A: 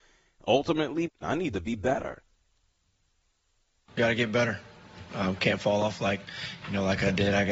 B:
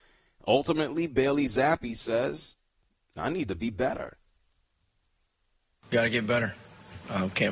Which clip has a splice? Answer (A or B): A